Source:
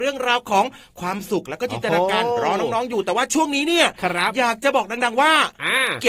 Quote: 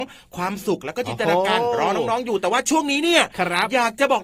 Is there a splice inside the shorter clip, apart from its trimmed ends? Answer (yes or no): no